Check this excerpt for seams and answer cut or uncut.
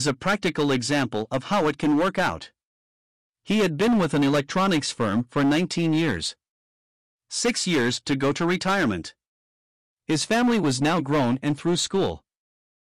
uncut